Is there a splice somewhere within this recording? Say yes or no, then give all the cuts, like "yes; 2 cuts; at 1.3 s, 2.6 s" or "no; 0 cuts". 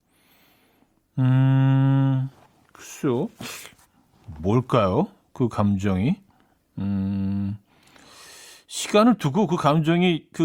no; 0 cuts